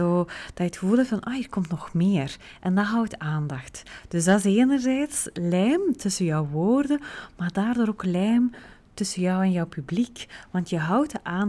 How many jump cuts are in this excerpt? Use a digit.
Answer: 0